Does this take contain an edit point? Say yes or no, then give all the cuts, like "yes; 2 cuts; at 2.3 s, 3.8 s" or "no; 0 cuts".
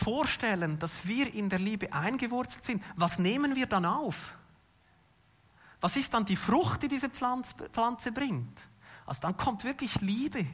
no; 0 cuts